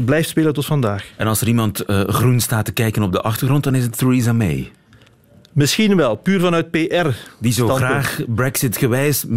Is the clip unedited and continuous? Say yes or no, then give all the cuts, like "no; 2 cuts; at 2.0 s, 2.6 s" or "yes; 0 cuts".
yes; 0 cuts